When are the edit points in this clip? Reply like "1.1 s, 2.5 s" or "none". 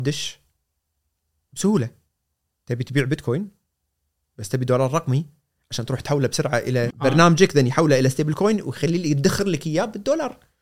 6.9 s